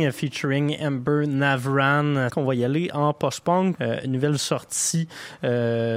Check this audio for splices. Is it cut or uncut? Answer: cut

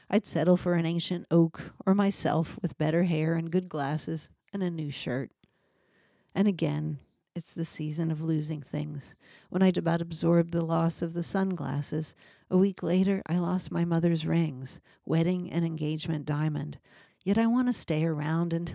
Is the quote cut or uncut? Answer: cut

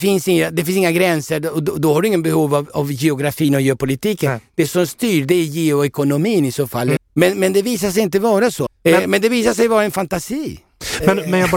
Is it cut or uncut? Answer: cut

